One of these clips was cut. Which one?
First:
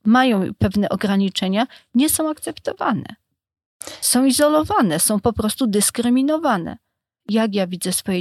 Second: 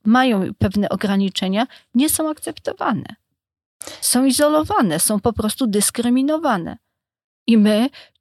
first; 1 cut; at 7.2 s

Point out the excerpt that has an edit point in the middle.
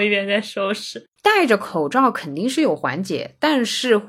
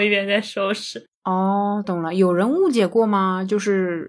first; 1 cut; at 1.2 s

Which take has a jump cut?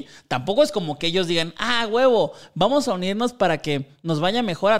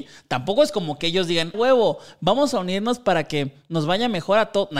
second; 1 cut; at 1.5 s

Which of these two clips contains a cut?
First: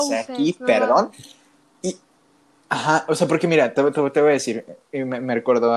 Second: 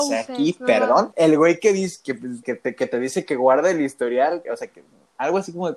second; 3 cuts; at 1.1 s, 2.4 s, 4.5 s

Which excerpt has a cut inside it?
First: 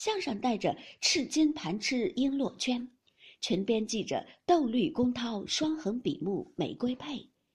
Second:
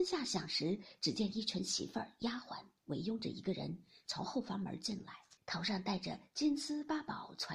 second; 1 cut; at 5.4 s

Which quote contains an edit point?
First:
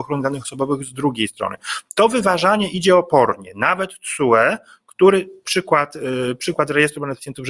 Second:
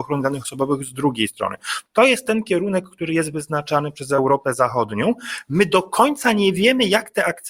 second; 1 cut; at 1.9 s

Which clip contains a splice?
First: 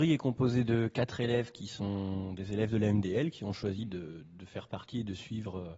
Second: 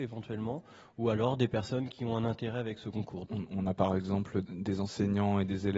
second; 2 cuts; at 3.2 s, 4.4 s

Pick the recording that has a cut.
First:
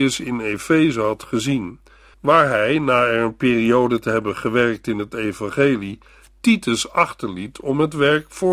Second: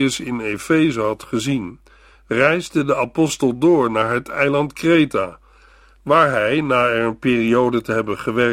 first; 1 cut; at 2.1 s

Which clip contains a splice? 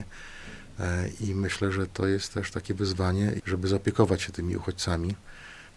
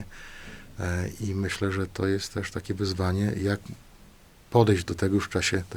first; 1 cut; at 3.4 s

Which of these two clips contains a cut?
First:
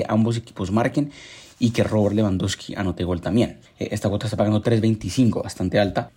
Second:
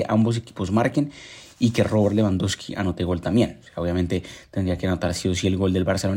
first; 1 cut; at 3.6 s

